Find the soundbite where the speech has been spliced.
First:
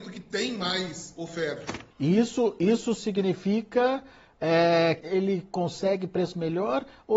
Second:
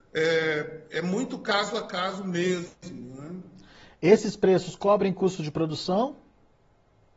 first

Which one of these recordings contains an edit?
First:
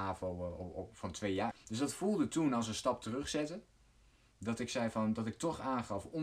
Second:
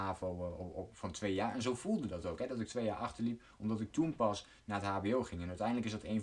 first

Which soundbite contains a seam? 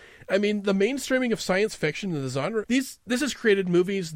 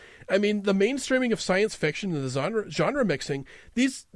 first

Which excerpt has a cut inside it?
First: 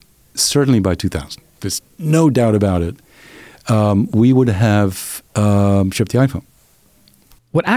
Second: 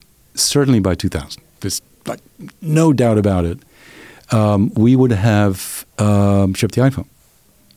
first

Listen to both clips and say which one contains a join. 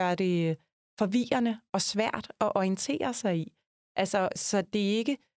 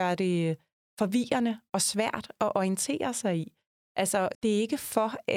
second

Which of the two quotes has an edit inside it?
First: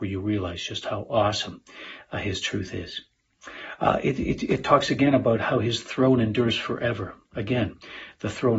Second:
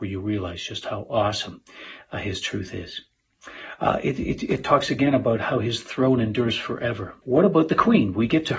second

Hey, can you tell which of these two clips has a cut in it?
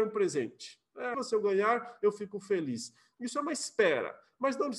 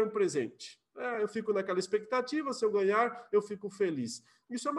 first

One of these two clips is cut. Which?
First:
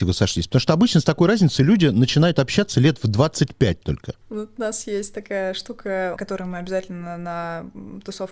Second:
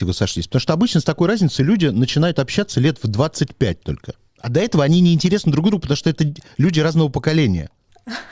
first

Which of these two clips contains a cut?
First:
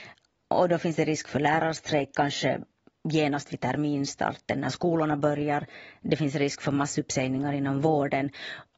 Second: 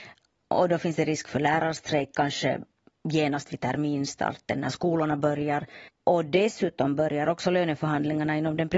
second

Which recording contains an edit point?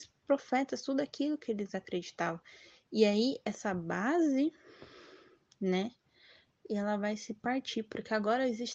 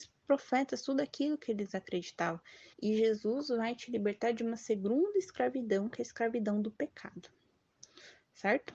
second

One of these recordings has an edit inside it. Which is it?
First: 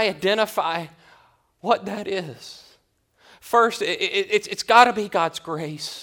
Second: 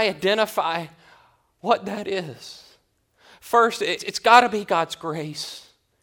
second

